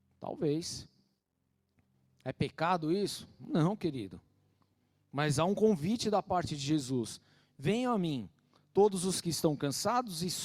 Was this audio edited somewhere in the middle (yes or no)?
no